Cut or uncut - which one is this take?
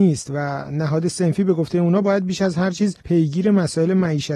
cut